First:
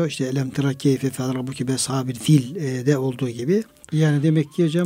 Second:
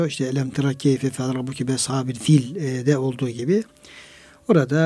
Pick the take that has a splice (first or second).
first